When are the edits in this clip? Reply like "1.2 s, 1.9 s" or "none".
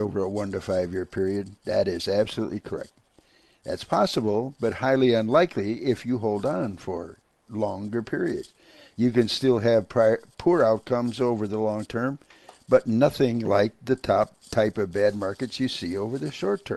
none